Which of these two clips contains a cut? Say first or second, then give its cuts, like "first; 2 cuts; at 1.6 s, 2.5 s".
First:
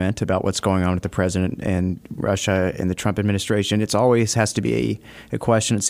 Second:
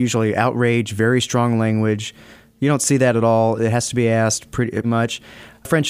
second; 1 cut; at 4.8 s